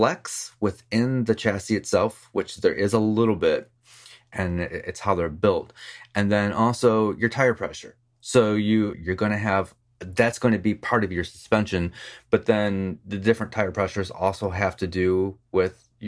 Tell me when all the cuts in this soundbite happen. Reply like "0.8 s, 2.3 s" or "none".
8.9 s